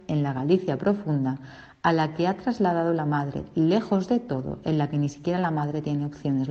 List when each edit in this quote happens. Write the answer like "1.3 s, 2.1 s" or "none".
none